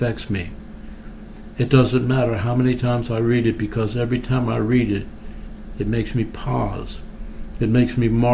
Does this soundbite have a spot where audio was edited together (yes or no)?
no